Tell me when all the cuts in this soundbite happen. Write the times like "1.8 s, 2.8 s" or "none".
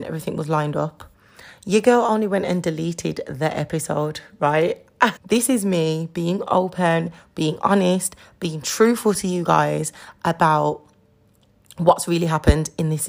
5.2 s